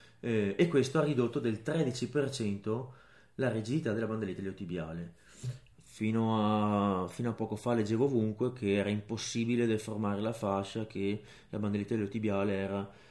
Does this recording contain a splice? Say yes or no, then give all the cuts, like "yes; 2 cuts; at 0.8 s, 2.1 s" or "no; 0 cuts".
yes; 1 cut; at 5.7 s